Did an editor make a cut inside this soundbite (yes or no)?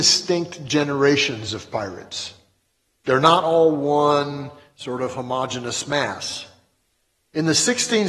no